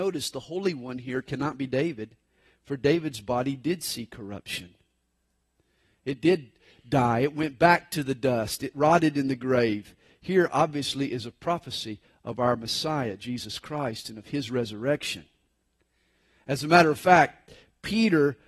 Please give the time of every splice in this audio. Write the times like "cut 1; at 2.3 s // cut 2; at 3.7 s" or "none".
none